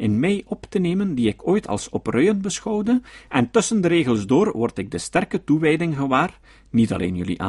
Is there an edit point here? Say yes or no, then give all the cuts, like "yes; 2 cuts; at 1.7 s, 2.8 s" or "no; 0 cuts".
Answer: no; 0 cuts